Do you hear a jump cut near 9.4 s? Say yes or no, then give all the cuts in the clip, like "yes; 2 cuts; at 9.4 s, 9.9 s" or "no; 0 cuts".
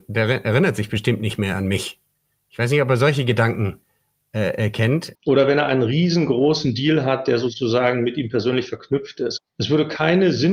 yes; 2 cuts; at 5.2 s, 9.4 s